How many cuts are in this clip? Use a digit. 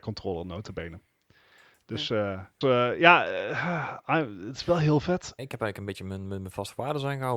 2